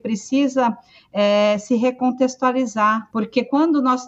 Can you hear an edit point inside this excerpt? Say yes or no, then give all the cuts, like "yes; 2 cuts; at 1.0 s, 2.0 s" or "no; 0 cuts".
yes; 1 cut; at 3.1 s